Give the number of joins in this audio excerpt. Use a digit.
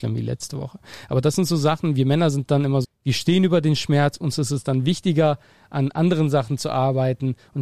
1